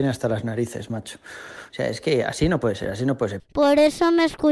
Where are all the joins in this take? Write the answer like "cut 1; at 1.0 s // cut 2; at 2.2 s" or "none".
cut 1; at 1.7 s // cut 2; at 3.4 s